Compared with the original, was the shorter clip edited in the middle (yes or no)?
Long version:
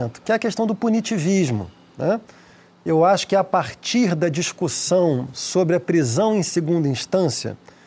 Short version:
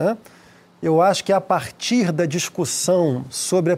no